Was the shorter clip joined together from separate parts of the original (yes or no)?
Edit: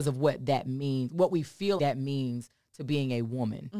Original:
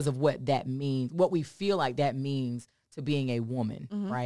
yes